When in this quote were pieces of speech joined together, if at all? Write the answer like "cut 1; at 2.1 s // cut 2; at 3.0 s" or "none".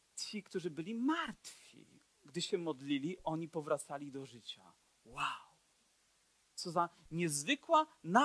none